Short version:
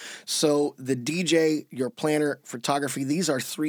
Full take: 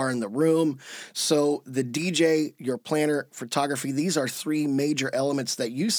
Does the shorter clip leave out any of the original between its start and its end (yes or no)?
no